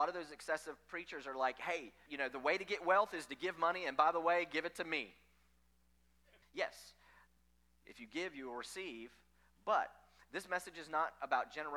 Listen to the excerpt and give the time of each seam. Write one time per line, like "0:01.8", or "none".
0:02.1
0:06.4